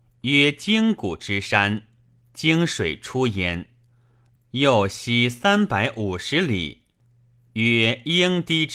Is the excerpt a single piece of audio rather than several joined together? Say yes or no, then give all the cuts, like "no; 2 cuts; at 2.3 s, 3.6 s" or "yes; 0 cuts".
no; 1 cut; at 4.4 s